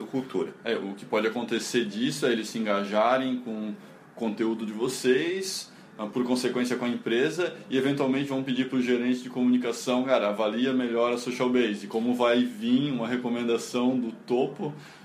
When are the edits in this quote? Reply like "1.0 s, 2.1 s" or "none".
none